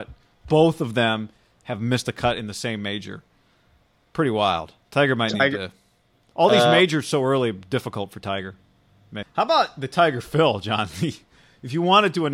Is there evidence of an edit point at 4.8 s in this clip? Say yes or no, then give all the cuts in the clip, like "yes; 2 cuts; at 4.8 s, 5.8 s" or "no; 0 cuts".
yes; 2 cuts; at 4.8 s, 9.2 s